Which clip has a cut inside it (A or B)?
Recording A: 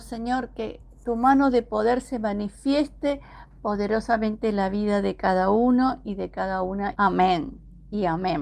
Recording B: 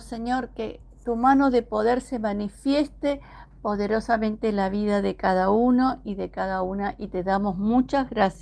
A